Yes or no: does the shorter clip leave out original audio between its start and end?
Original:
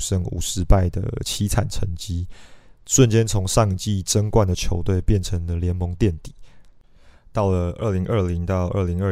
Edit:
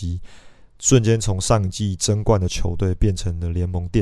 no